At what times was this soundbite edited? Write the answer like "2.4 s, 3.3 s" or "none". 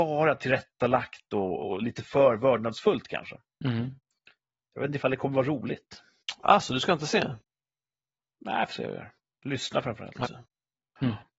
10.2 s